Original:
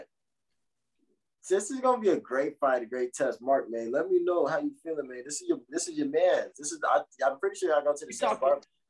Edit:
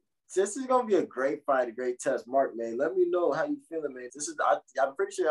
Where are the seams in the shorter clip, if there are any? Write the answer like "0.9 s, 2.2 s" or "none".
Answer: 4.1 s